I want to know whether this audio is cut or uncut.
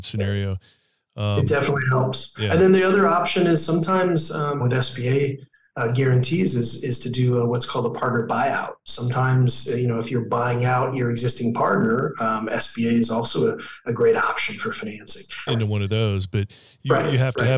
cut